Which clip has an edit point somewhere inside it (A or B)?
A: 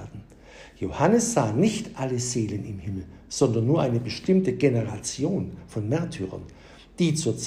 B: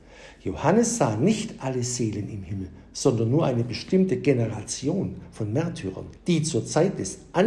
B